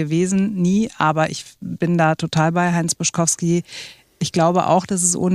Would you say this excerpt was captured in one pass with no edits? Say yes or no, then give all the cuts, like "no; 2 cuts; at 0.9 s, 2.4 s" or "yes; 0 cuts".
yes; 0 cuts